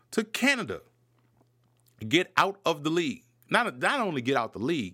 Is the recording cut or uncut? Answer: uncut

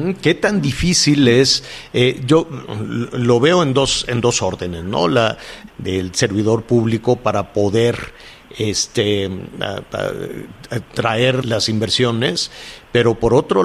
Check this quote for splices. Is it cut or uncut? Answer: cut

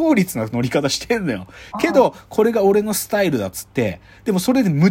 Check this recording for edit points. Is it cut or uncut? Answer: uncut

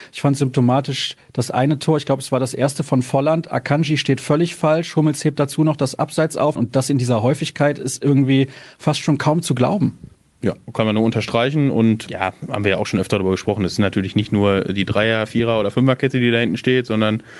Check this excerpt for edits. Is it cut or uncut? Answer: cut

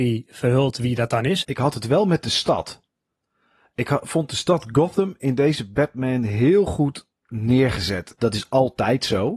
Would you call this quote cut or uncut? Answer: cut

